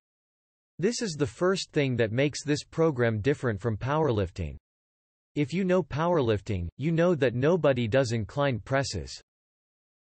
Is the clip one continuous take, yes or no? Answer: no